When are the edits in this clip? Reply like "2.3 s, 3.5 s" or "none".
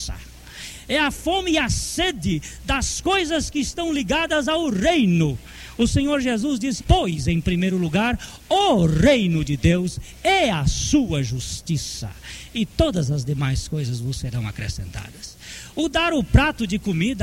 6.8 s